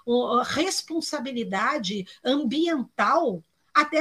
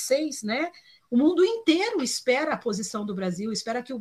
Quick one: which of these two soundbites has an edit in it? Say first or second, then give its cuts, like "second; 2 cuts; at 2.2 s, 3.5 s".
second; 1 cut; at 1.0 s